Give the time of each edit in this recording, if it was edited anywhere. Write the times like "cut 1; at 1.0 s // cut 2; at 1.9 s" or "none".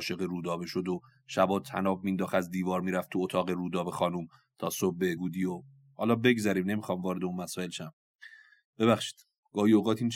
cut 1; at 5.2 s